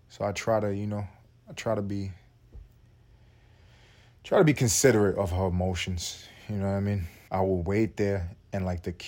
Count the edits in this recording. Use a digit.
1